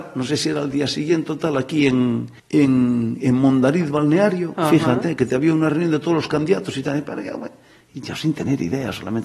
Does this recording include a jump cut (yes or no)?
yes